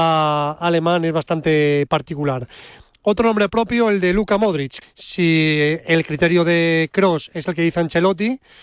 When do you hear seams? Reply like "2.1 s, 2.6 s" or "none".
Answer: 4.8 s